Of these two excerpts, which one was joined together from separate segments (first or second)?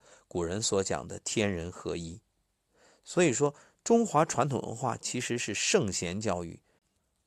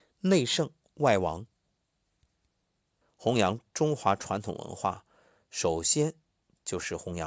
second